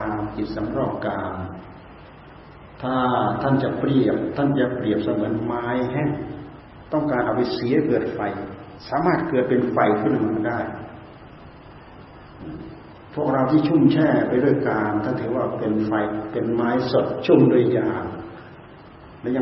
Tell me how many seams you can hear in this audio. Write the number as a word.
zero